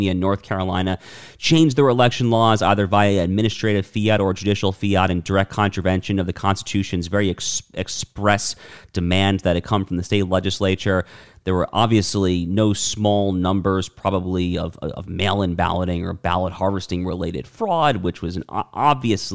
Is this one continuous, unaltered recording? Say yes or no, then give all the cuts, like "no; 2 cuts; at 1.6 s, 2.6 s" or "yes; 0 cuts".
yes; 0 cuts